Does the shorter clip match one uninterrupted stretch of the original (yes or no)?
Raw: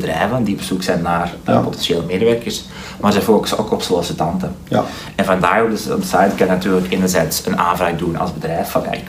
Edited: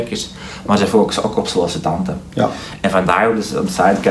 yes